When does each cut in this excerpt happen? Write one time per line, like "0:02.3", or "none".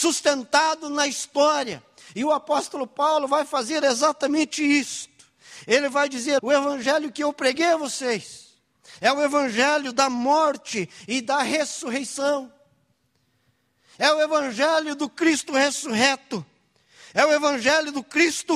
0:06.4